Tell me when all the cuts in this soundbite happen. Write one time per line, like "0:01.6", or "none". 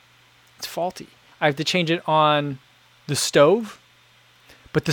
0:01.3

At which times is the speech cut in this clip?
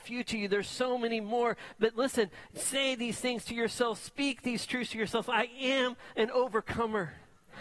none

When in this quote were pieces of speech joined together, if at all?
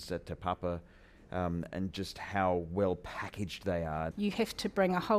0:01.7
0:04.1

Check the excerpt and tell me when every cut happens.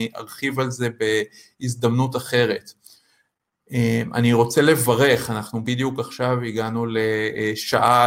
none

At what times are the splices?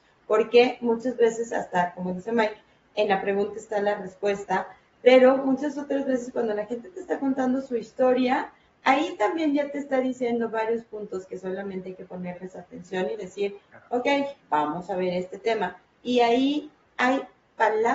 0:14.4

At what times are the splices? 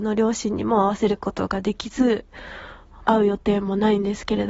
0:03.1

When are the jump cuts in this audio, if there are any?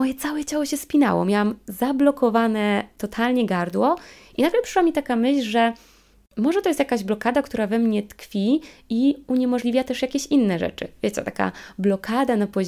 none

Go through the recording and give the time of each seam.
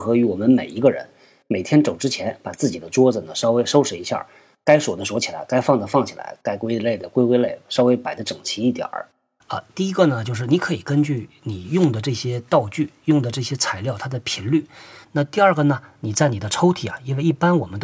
0:09.4
0:15.0

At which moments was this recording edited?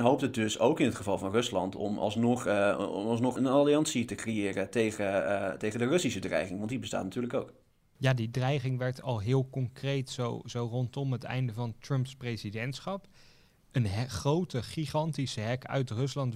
0:03.4

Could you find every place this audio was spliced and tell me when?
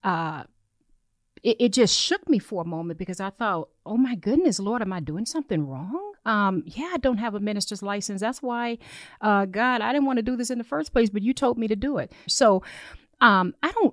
0:12.3

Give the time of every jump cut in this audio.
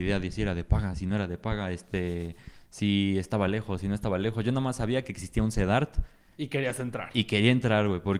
none

